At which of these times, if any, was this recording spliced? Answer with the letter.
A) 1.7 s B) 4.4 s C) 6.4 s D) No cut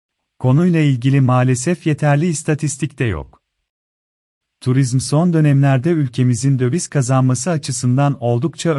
B